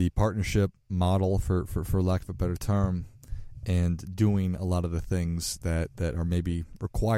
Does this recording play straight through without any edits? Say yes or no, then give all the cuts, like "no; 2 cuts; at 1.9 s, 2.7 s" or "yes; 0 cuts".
yes; 0 cuts